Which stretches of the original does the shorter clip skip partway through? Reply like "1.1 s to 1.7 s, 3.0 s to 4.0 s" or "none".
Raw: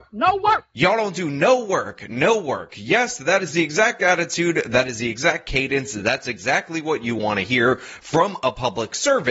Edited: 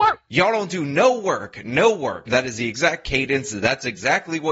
2.7 s to 4.7 s

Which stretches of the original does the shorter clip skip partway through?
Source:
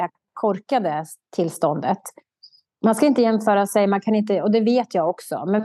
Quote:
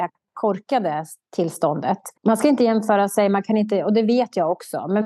2.2 s to 2.7 s

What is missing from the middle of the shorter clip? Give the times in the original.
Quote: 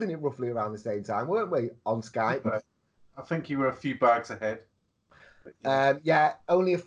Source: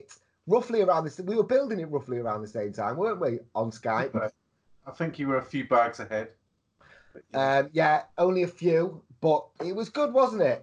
none

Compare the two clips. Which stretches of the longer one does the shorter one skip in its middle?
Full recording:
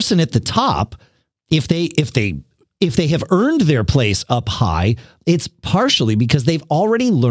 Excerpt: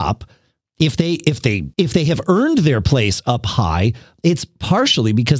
2.4 s to 2.8 s

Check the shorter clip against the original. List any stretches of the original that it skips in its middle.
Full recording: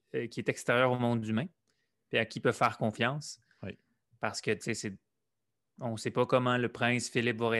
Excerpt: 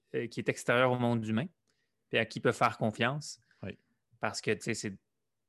none

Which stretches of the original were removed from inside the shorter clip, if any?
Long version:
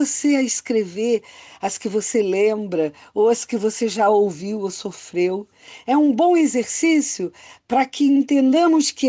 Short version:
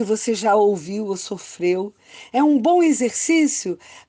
none

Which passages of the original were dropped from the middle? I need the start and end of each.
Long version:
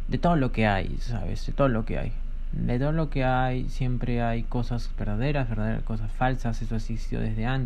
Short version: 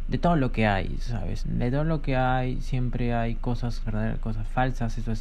1.4 s to 2.5 s, 4.9 s to 5.5 s

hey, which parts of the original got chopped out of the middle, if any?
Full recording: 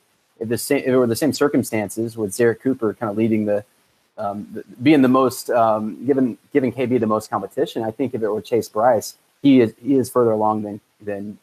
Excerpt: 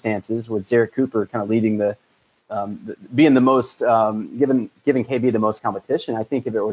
none

